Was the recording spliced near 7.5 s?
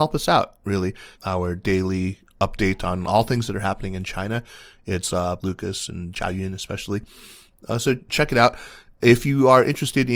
no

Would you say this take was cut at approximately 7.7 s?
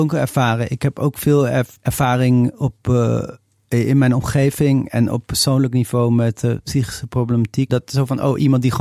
yes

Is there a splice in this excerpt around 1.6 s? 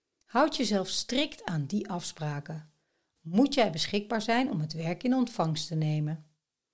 no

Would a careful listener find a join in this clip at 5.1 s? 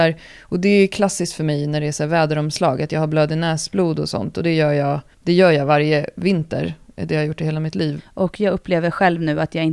yes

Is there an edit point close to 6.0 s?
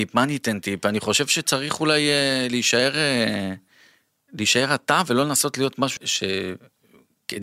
yes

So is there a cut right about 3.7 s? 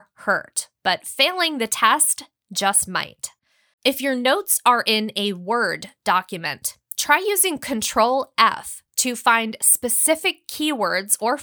yes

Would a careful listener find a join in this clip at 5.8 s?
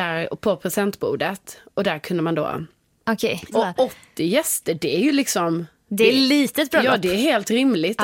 no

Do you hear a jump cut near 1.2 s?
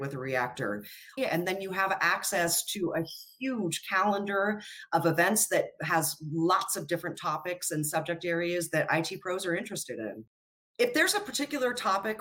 yes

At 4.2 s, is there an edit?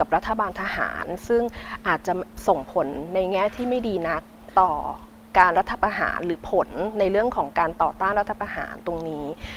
no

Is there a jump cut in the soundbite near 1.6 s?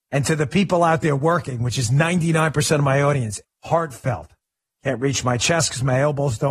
no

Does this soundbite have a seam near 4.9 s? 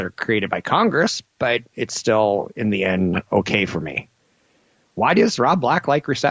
no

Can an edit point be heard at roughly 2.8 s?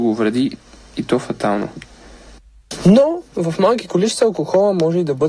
no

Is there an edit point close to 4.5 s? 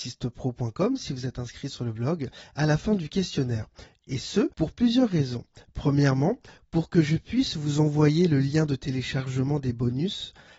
yes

